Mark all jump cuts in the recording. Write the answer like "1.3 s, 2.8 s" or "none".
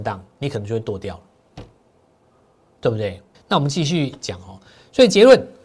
3.3 s